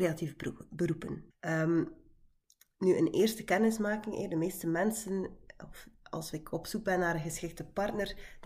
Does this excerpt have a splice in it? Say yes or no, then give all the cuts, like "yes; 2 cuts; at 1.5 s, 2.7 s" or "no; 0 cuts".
yes; 1 cut; at 1.3 s